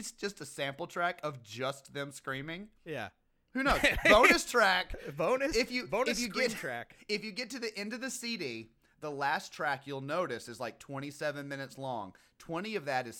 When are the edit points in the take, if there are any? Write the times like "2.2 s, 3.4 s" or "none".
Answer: none

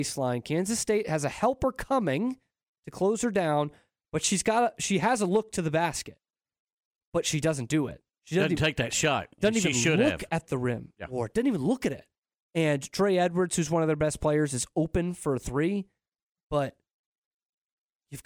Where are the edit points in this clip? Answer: 12.3 s

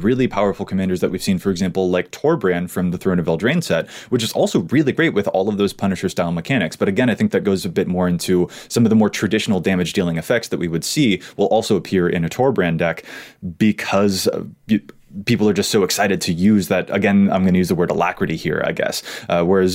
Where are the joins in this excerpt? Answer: none

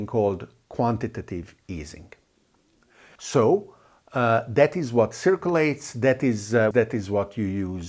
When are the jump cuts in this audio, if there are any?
3.2 s, 6.7 s

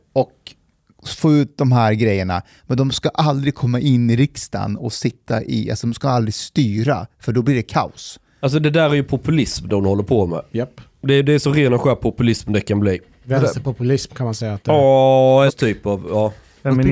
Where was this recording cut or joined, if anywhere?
15.5 s

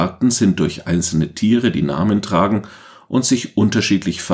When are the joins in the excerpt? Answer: none

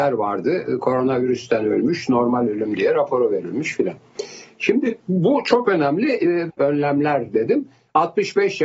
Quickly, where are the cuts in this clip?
6.5 s

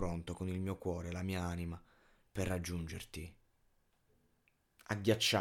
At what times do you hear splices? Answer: none

